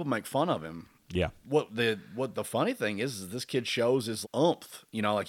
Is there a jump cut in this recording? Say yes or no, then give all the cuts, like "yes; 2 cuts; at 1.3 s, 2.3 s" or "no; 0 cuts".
yes; 2 cuts; at 1.4 s, 4.2 s